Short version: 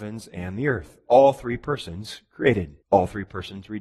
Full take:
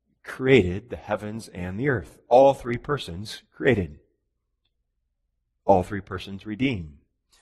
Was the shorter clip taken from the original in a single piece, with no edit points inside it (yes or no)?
no